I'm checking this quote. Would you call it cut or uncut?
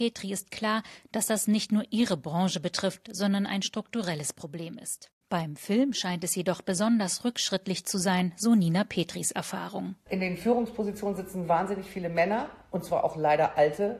uncut